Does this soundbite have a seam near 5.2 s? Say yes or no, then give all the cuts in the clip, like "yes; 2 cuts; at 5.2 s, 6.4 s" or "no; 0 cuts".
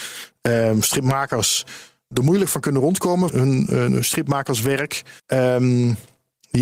yes; 2 cuts; at 3.3 s, 5.2 s